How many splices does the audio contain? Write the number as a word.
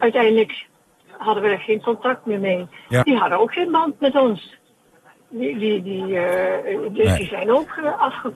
one